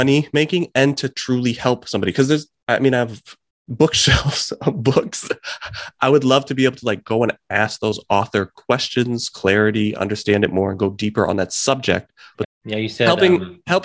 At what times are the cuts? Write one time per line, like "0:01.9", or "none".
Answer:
0:12.4